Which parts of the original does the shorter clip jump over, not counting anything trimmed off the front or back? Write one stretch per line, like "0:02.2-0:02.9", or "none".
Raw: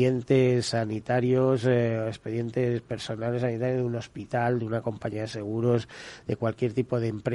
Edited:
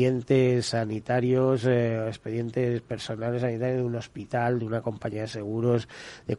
none